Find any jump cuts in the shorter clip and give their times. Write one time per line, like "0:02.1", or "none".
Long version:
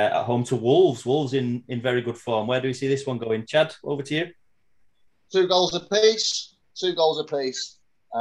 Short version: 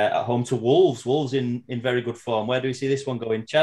none